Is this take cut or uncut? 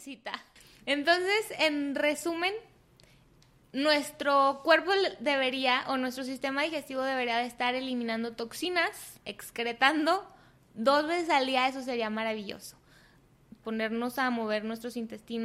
cut